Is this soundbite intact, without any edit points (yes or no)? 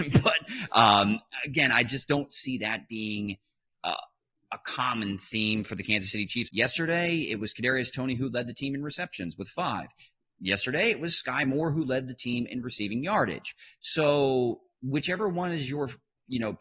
no